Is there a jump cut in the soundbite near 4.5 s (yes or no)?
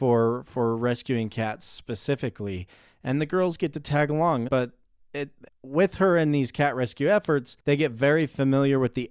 yes